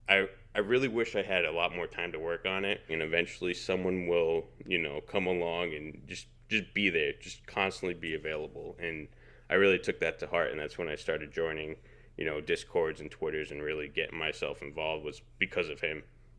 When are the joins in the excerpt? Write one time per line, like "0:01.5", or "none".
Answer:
0:02.9